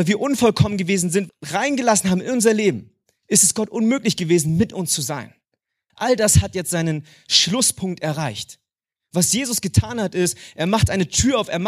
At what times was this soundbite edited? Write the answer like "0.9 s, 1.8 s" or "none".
1.3 s, 5.9 s